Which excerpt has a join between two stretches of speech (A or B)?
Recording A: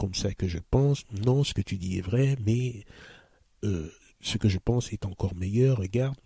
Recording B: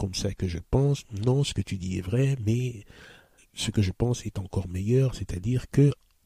B